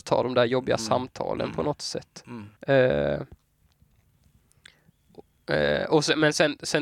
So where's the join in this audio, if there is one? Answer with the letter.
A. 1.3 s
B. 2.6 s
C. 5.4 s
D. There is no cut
B